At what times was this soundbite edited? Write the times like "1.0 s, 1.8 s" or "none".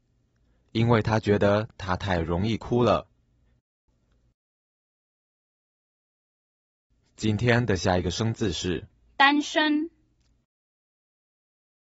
3.9 s

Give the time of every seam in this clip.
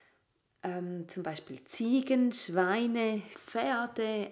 3.3 s

